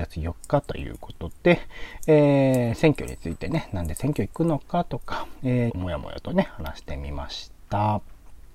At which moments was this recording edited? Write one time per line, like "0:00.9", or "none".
0:05.7